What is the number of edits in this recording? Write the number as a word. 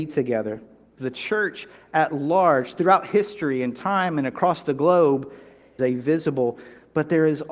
two